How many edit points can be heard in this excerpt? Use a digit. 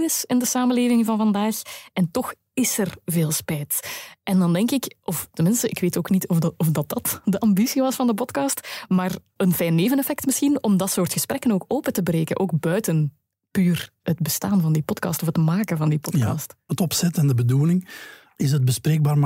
1